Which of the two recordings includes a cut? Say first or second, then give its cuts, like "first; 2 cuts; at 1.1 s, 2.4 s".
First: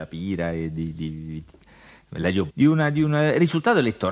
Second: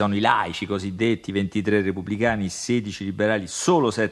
first; 1 cut; at 2.5 s